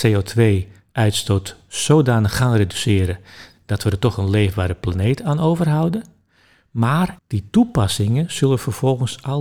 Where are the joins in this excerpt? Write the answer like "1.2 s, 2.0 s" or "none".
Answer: 7.2 s